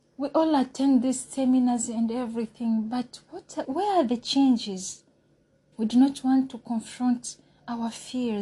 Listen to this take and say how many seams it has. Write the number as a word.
two